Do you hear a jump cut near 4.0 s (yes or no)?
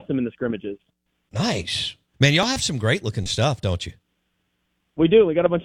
no